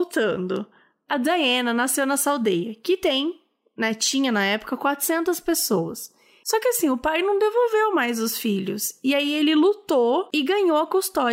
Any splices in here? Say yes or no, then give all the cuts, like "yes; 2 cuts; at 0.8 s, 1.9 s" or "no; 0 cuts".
yes; 1 cut; at 6.4 s